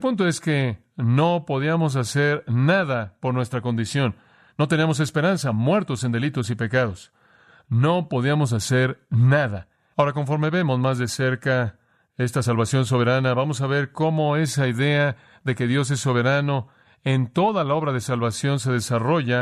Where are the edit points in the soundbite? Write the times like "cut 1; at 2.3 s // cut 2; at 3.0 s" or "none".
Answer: cut 1; at 9.9 s

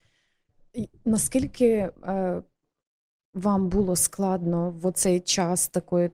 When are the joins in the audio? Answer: none

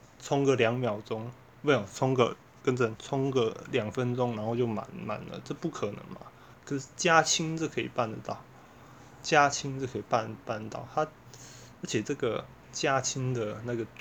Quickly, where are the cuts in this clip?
none

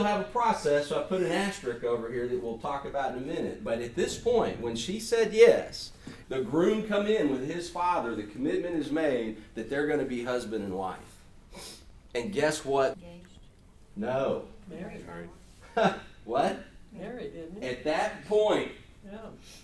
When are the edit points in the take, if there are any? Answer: cut 1; at 6.2 s // cut 2; at 12.9 s

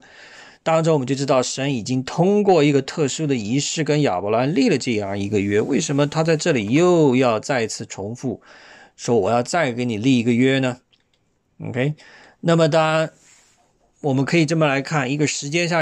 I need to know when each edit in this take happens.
none

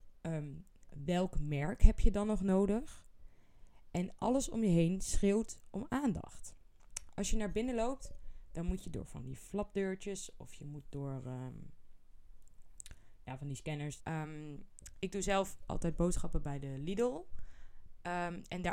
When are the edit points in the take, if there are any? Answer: cut 1; at 14.0 s

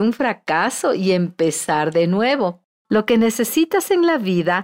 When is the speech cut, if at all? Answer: cut 1; at 2.7 s

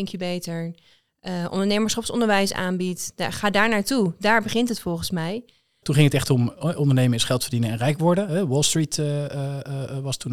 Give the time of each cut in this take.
cut 1; at 5.8 s

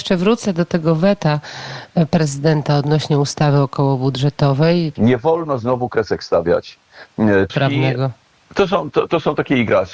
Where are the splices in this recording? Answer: cut 1; at 5.0 s // cut 2; at 7.5 s

